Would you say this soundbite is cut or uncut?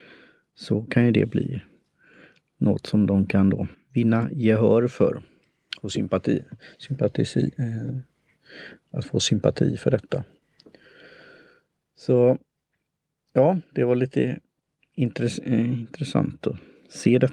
cut